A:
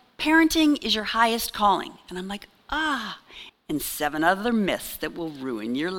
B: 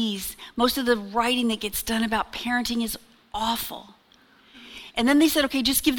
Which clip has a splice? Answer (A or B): A